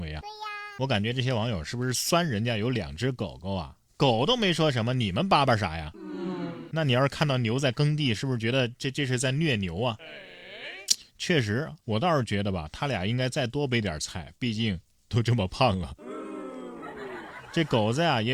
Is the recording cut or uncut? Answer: uncut